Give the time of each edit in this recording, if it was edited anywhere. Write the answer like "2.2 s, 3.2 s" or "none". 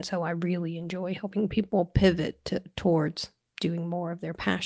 none